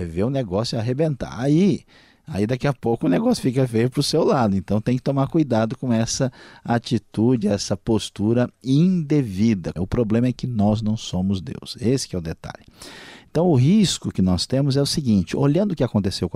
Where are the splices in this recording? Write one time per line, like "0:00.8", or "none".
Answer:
0:09.8